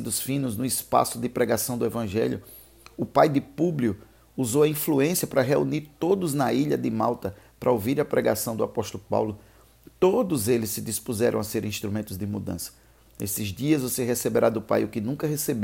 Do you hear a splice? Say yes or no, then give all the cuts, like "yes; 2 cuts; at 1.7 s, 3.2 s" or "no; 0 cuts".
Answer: yes; 1 cut; at 13.0 s